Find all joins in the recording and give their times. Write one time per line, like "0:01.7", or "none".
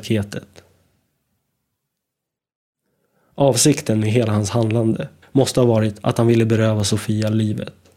0:05.2